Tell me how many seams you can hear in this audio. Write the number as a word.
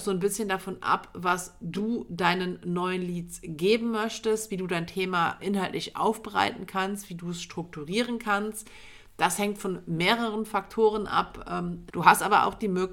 two